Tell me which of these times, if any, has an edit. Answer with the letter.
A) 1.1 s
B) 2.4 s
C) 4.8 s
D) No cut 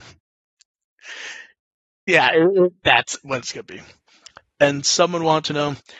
C